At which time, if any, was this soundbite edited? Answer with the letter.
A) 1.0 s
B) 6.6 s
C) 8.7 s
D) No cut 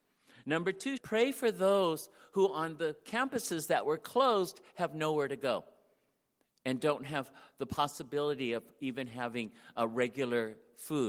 A